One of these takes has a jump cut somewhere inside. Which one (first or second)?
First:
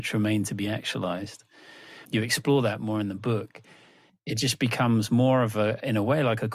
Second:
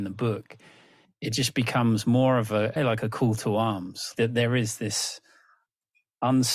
second